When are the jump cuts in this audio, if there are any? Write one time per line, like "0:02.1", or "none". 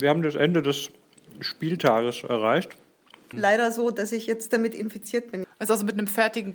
0:03.3
0:05.4